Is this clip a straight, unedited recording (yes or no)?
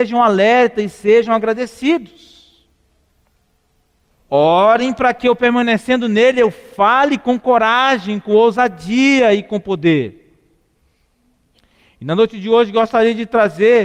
no